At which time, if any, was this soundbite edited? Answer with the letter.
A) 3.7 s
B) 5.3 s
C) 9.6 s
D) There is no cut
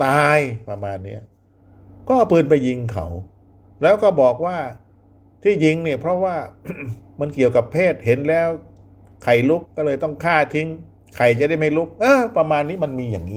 C